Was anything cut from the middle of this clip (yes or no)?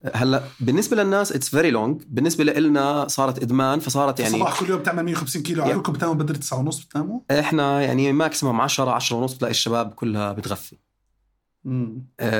yes